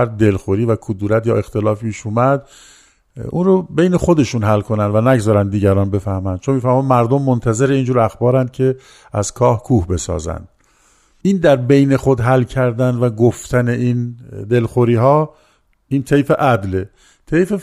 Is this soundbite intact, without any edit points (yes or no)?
yes